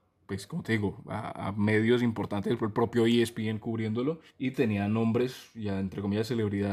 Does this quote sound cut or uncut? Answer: cut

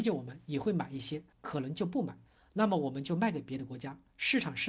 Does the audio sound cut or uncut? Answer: cut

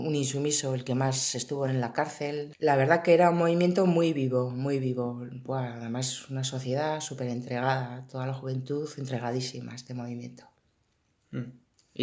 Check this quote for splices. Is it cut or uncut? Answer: cut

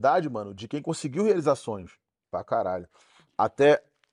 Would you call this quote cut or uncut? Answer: cut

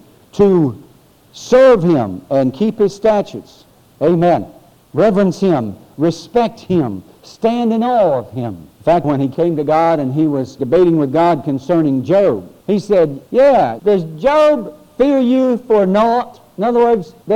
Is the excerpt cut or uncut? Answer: cut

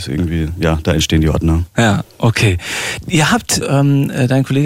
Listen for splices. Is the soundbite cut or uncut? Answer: cut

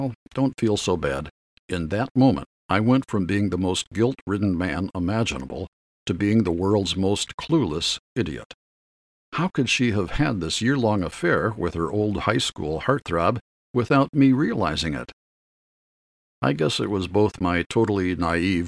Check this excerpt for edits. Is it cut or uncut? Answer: cut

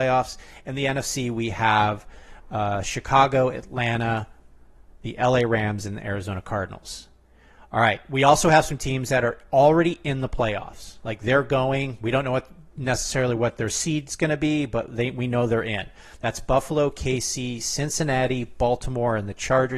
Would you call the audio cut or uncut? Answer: uncut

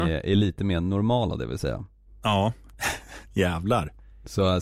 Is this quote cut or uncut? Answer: cut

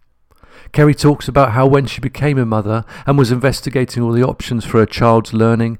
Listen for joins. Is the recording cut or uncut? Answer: uncut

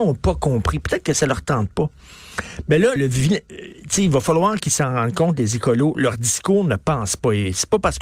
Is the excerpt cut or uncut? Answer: cut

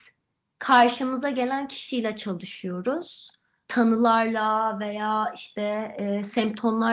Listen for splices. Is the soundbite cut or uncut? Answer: uncut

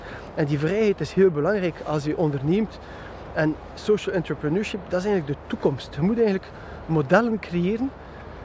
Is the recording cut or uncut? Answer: uncut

